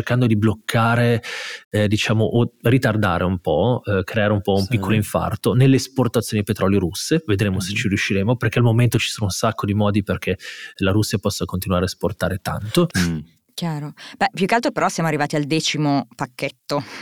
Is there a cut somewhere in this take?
yes; 1 cut; at 12.9 s

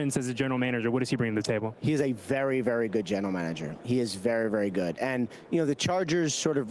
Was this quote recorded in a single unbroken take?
yes; 0 cuts

